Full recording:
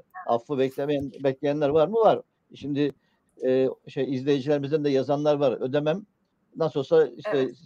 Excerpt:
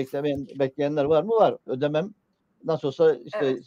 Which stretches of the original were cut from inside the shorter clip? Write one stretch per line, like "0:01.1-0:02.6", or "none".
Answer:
0:02.3-0:05.6

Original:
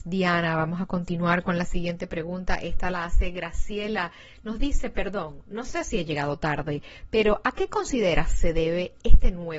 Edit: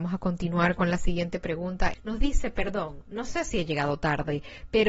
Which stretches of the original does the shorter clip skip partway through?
0:02.6-0:04.3

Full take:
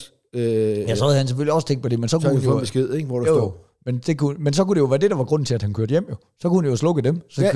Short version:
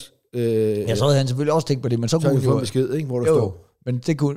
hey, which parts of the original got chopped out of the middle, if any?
none

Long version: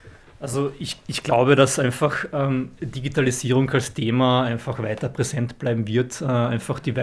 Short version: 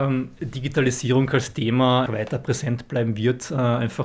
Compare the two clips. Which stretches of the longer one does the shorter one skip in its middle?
0:04.5-0:04.8

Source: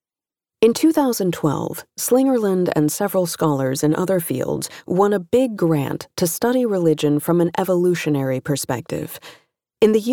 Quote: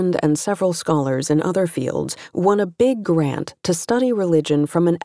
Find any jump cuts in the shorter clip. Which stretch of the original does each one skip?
none

